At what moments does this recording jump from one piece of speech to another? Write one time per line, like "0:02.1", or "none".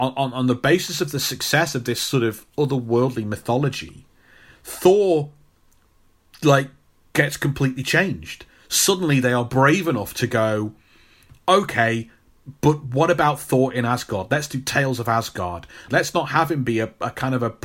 0:15.9